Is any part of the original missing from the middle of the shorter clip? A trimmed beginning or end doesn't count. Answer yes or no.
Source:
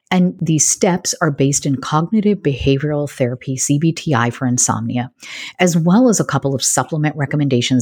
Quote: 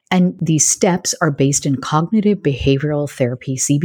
no